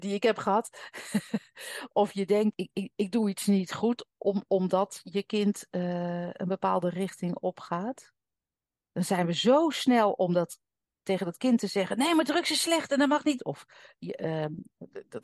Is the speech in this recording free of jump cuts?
no; 2 cuts; at 2.5 s, 13.4 s

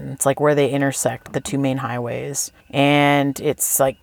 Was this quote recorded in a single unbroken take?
no; 1 cut; at 2.6 s

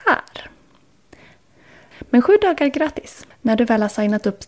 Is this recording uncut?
no; 2 cuts; at 1.9 s, 3.3 s

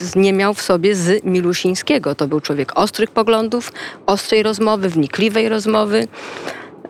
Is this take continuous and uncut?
yes; 0 cuts

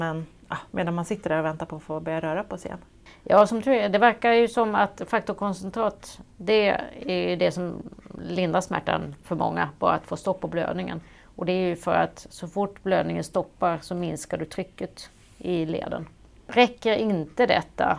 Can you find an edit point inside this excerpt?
no; 0 cuts

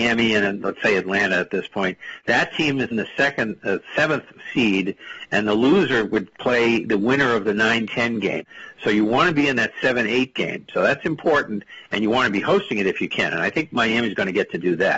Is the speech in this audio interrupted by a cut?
yes; 1 cut; at 2.9 s

